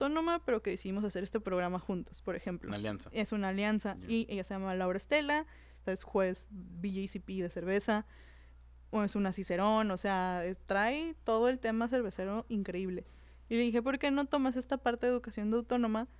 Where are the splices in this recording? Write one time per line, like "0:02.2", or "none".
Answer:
0:05.8